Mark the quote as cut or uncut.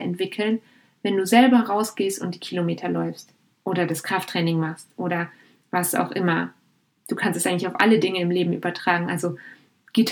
uncut